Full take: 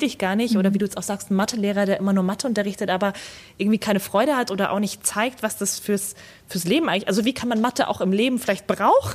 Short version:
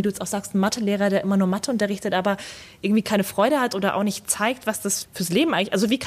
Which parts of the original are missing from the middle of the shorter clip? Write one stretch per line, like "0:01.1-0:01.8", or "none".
0:05.8-0:06.4